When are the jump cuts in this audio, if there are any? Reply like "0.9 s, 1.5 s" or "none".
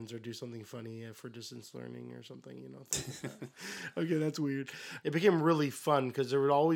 3.5 s, 5.0 s